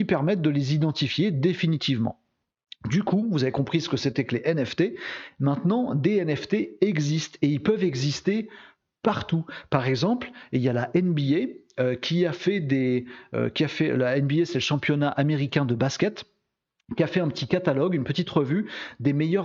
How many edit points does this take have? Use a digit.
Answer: 0